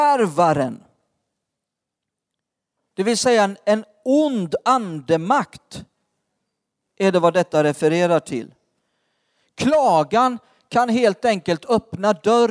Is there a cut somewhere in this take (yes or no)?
no